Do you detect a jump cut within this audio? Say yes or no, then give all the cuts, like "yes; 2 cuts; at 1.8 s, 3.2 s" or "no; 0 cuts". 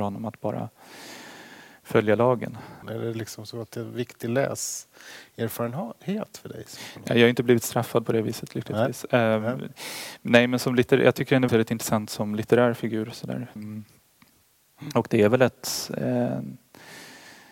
yes; 3 cuts; at 2.8 s, 11.5 s, 13.6 s